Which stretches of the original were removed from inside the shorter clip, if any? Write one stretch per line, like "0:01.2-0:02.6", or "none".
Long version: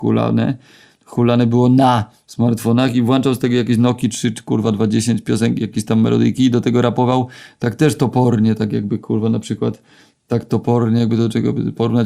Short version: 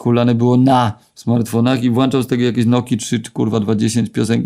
none